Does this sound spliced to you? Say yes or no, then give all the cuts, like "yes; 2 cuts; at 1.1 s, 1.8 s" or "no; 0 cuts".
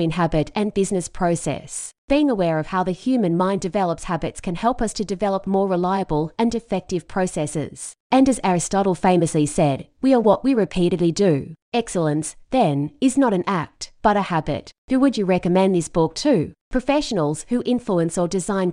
no; 0 cuts